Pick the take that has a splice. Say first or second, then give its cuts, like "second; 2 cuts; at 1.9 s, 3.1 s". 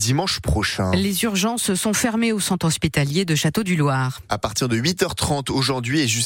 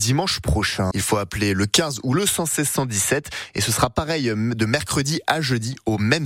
second; 1 cut; at 0.9 s